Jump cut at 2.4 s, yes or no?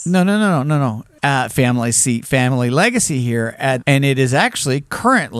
no